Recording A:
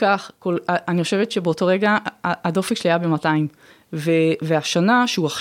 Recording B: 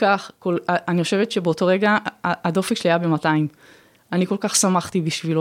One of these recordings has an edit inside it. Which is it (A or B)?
A